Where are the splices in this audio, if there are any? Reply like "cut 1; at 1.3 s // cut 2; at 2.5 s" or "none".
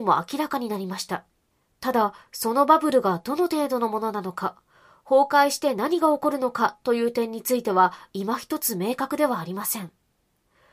none